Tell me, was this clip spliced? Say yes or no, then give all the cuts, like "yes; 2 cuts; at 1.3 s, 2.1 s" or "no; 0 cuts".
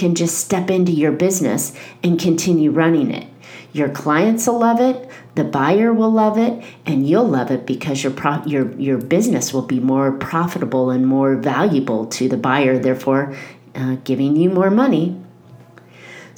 no; 0 cuts